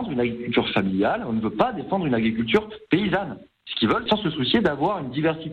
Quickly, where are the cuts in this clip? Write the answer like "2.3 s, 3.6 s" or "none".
4.1 s

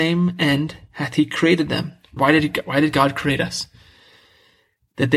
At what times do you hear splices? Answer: 2.2 s

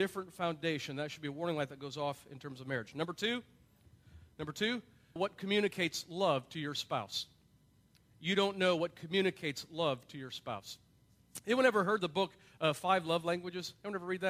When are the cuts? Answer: 5.2 s

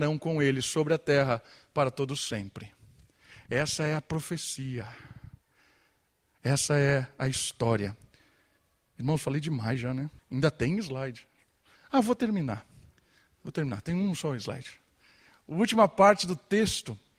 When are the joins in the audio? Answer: 10.2 s, 11.7 s

